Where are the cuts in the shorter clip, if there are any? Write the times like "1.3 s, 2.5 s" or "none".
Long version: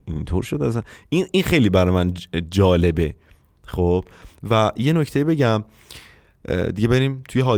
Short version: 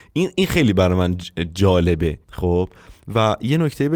2.2 s